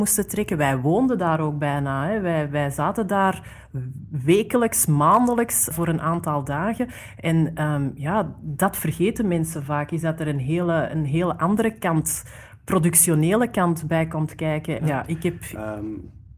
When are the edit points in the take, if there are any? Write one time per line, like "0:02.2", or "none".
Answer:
0:05.7
0:14.8